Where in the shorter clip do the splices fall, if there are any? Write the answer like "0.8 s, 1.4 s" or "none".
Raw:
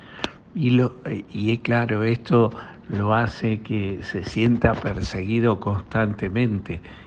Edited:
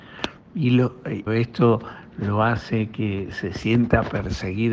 1.3 s